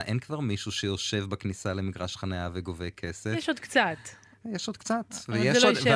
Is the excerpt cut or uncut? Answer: uncut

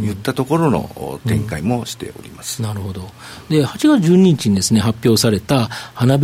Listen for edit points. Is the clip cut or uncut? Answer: uncut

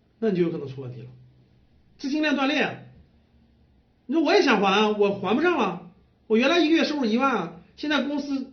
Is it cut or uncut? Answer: uncut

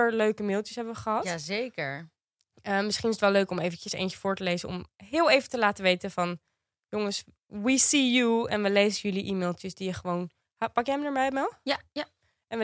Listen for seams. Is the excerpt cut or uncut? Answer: uncut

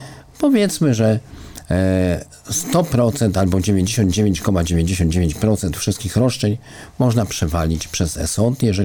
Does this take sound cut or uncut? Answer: uncut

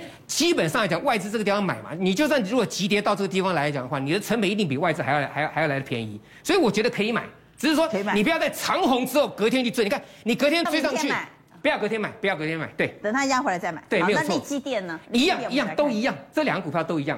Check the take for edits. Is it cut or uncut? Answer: cut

